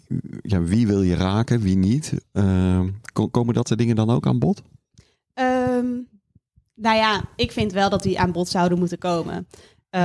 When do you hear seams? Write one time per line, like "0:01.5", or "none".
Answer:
0:02.2